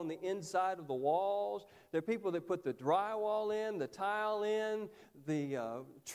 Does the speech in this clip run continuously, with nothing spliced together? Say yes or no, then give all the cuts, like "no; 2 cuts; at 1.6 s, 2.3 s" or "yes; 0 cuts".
yes; 0 cuts